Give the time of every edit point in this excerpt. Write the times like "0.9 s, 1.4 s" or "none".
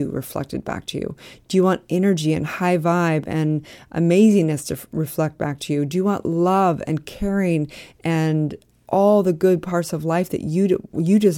none

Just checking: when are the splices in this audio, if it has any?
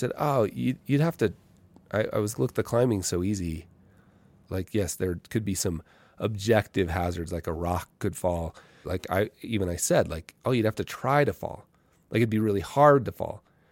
2.3 s, 4.5 s, 8.8 s

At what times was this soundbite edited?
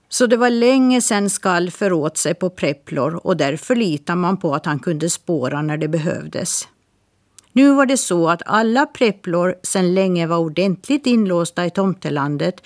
7.4 s

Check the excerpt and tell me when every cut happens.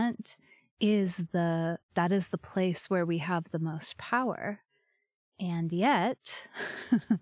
none

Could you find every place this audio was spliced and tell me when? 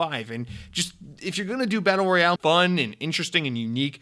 2.4 s

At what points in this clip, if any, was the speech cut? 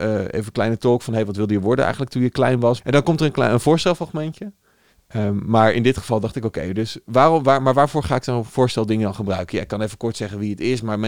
2.8 s

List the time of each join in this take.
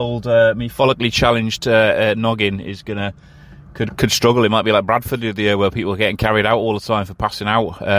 3.9 s

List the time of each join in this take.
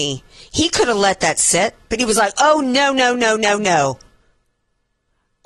none

